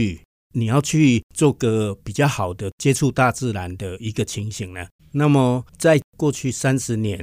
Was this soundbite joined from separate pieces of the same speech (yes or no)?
yes